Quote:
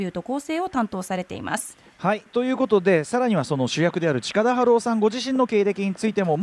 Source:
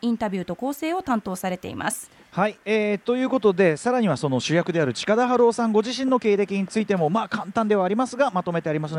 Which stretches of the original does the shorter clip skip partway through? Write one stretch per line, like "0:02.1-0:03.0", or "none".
0:02.6-0:03.0

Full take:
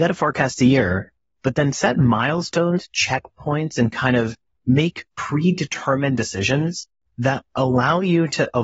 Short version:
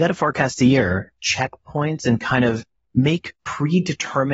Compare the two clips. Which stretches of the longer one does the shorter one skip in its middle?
0:01.2-0:02.9

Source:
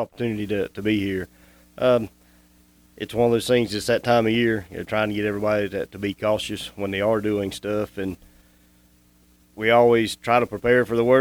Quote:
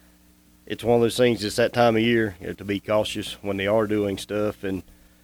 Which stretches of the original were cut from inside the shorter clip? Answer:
0:04.9-0:05.9

